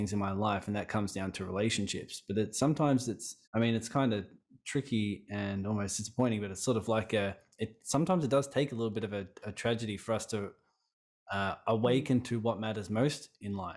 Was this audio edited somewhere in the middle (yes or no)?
yes